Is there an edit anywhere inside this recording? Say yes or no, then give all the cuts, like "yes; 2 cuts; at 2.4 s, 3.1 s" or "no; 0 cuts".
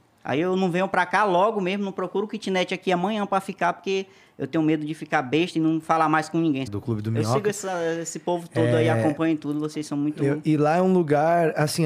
yes; 2 cuts; at 6.7 s, 10.4 s